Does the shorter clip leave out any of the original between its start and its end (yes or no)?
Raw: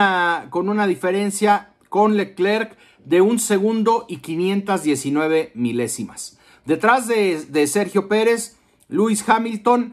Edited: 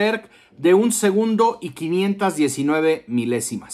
no